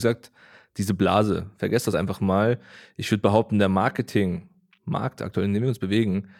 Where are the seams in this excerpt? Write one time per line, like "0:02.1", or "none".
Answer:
none